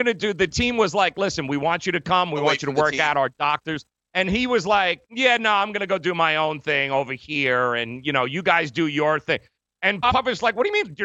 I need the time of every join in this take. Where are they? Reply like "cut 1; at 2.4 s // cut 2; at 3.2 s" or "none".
none